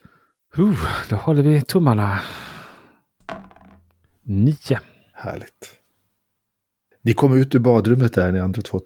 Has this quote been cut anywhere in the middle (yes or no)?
no